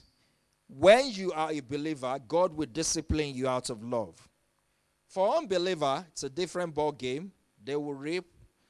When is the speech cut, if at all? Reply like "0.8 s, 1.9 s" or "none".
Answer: none